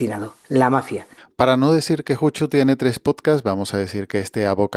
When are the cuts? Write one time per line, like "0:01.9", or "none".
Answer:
none